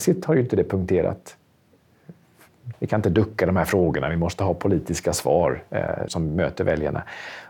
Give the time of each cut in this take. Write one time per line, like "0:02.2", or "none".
0:02.7
0:06.1